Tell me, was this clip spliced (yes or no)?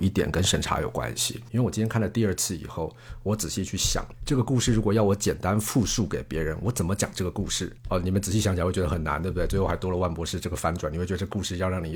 no